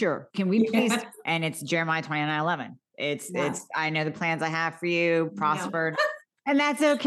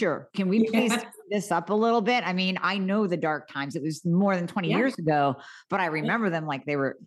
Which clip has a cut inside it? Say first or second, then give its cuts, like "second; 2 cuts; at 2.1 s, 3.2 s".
first; 2 cuts; at 1.2 s, 5.9 s